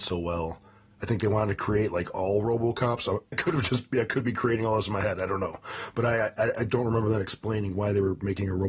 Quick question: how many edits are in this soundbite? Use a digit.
1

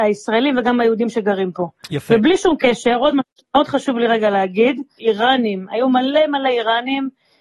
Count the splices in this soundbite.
1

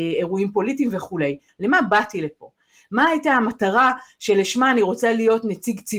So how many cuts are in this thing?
1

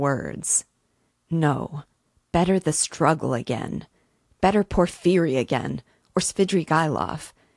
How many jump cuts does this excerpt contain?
1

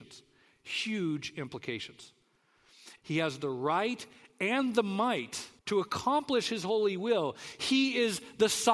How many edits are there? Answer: 2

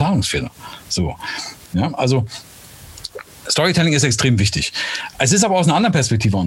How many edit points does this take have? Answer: 1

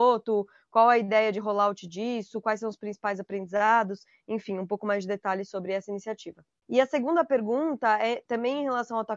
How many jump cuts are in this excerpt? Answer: 1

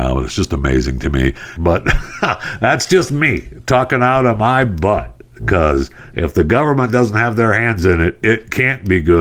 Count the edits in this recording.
1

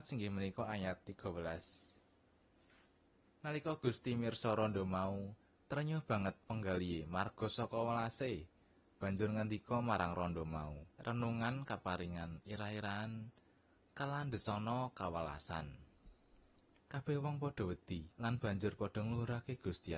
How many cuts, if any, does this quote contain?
3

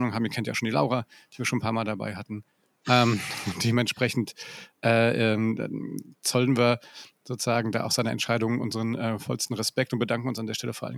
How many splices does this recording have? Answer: 1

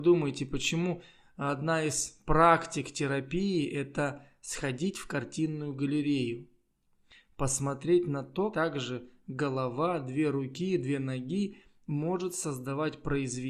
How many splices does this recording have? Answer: 1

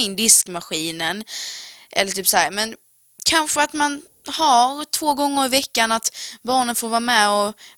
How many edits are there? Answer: 0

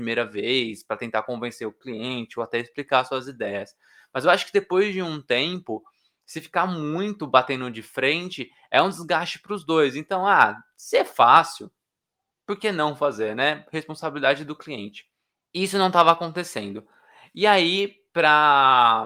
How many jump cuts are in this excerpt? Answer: 0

